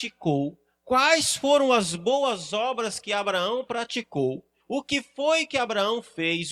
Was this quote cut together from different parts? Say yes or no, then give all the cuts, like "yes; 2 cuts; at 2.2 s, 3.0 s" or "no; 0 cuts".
yes; 1 cut; at 4.6 s